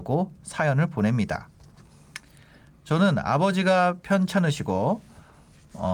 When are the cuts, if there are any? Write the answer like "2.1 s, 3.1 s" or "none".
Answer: none